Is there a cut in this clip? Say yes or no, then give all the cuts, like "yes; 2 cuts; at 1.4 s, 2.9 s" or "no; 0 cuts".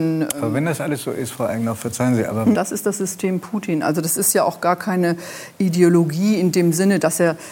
yes; 1 cut; at 2.5 s